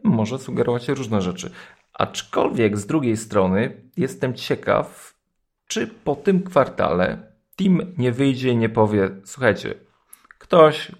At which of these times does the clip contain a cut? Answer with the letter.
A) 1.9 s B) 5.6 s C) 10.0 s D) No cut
D